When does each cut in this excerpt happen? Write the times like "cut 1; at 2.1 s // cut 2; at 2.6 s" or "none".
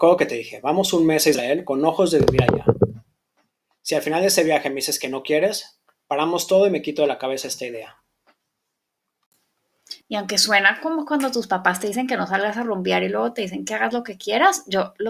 cut 1; at 10.0 s